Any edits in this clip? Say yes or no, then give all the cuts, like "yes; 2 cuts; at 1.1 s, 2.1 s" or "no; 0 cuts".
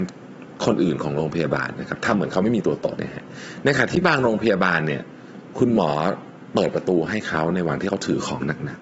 yes; 1 cut; at 3.0 s